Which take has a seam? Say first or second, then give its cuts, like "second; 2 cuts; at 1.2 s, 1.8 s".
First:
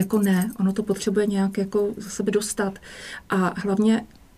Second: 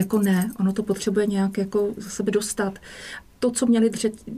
second; 1 cut; at 3.2 s